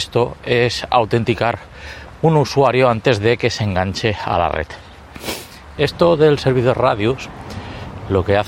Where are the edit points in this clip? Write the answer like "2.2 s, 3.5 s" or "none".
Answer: 5.8 s